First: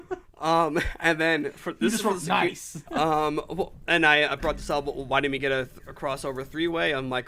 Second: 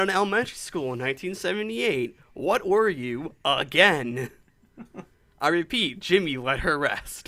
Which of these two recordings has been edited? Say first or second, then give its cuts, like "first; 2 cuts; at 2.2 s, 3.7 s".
first; 1 cut; at 2.9 s